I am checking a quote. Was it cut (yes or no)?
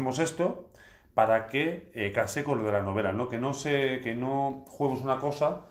no